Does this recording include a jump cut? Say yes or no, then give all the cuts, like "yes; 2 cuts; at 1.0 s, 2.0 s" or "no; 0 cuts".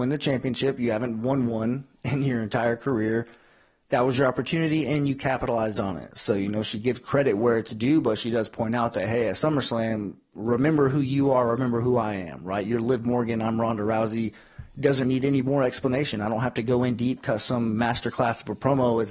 yes; 1 cut; at 15.0 s